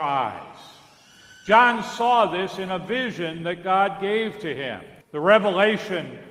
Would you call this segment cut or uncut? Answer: cut